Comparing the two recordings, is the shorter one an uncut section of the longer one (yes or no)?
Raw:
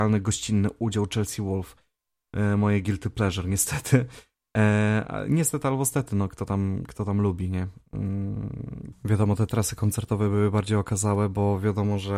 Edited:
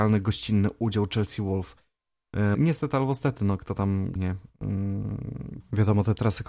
no